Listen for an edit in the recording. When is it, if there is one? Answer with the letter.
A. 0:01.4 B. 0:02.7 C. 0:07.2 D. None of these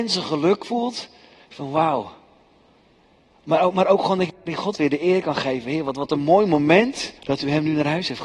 C